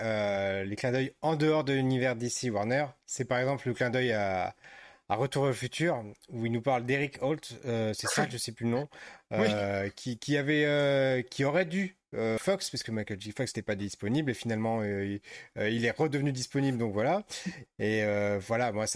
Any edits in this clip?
yes; 2 cuts; at 12.4 s, 17.7 s

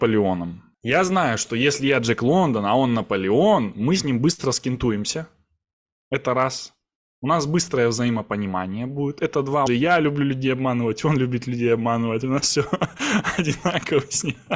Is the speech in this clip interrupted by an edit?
yes; 1 cut; at 9.7 s

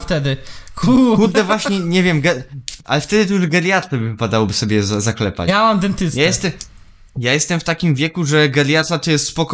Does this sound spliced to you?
no; 0 cuts

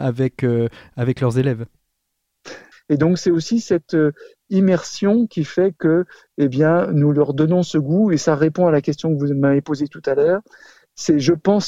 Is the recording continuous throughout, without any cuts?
no; 1 cut; at 2.7 s

